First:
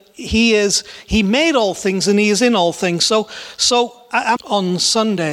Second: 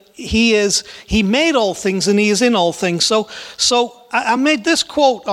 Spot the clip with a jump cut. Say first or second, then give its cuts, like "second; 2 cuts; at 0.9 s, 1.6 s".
first; 1 cut; at 4.4 s